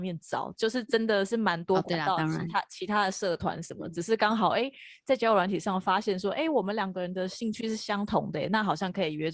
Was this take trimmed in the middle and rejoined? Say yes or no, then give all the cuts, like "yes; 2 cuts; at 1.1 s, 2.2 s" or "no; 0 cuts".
no; 0 cuts